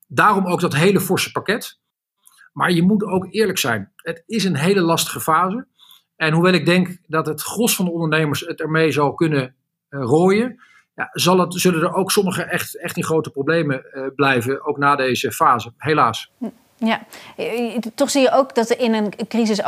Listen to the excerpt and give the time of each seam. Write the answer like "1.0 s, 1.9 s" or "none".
2.4 s